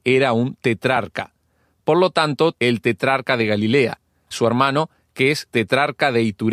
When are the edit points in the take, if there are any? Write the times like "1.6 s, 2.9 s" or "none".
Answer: 2.5 s, 4.3 s